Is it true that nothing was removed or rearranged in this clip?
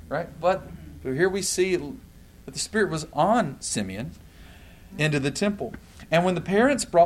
no; 1 cut; at 4.9 s

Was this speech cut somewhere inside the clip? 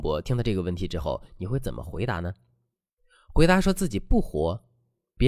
no; 0 cuts

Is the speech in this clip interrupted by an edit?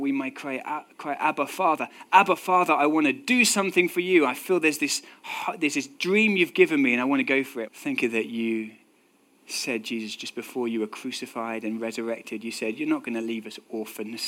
yes; 1 cut; at 7.7 s

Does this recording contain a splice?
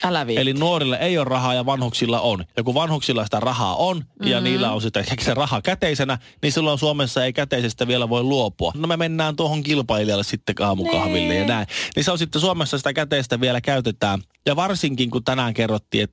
yes; 1 cut; at 8.7 s

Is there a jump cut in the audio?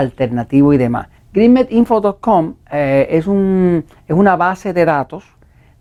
yes; 1 cut; at 1.2 s

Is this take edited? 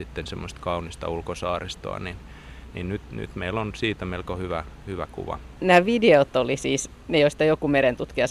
yes; 1 cut; at 5.6 s

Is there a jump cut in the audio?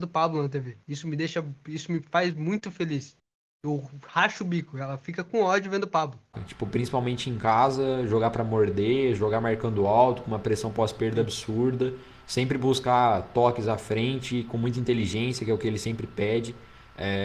yes; 1 cut; at 6.3 s

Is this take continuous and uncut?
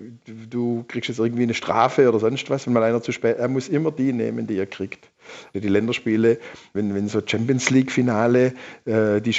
no; 2 cuts; at 5.5 s, 6.7 s

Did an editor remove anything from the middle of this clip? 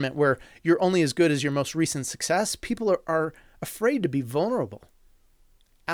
no; 0 cuts

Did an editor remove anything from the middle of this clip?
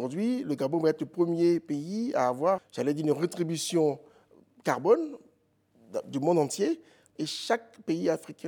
yes; 2 cuts; at 2.6 s, 7.2 s

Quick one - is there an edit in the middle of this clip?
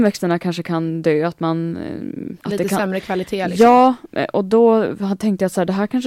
yes; 1 cut; at 2.4 s

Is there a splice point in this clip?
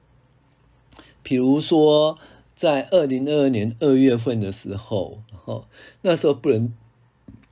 yes; 1 cut; at 5.3 s

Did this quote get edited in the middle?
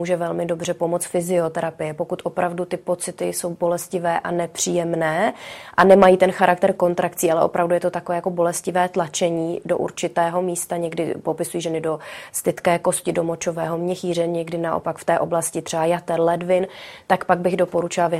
no; 0 cuts

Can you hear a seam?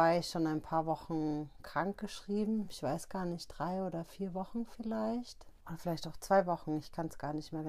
no; 0 cuts

